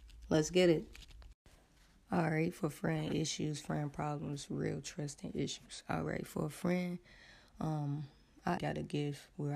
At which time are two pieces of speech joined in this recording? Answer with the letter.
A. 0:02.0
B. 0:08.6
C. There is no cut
B